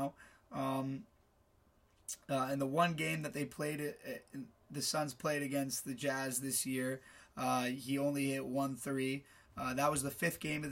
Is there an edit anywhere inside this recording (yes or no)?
no